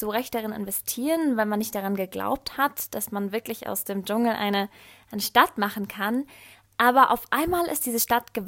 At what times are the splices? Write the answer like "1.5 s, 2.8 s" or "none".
none